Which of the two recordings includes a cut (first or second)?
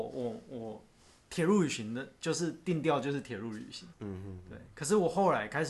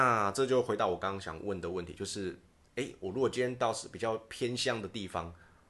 first